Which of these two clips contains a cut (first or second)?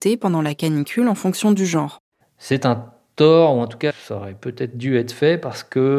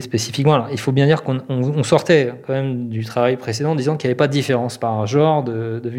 first